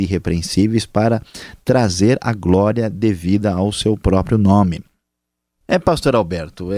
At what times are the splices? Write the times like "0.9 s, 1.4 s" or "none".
5.6 s